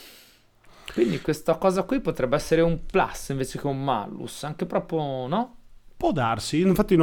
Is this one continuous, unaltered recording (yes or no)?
yes